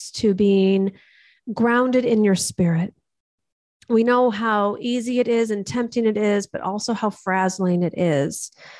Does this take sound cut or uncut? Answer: uncut